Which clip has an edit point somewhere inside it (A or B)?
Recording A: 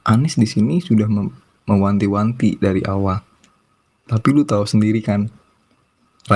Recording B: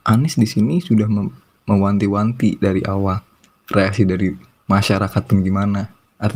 B